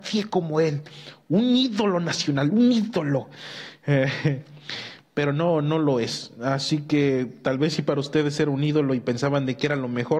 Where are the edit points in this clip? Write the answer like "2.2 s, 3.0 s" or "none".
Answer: none